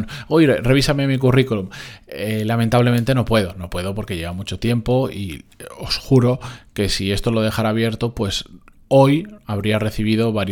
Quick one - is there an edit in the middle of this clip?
no; 0 cuts

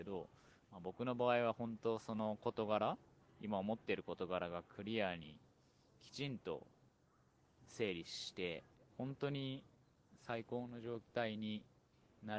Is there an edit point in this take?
yes; 1 cut; at 8.9 s

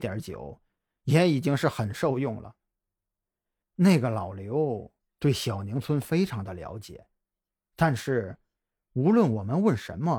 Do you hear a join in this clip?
no; 0 cuts

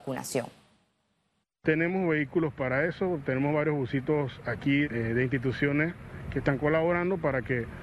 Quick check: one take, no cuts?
no; 1 cut; at 4.8 s

